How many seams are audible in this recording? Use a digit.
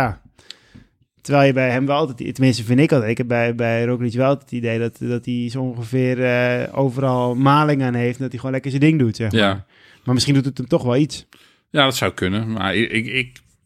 0